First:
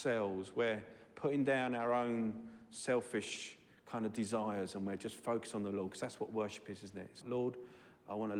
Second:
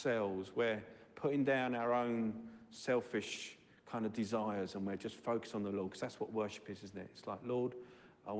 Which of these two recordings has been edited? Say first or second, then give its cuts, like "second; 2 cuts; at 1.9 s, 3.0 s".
first; 1 cut; at 7.2 s